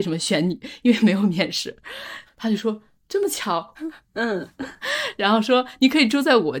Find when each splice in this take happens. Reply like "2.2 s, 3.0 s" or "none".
2.3 s, 3.8 s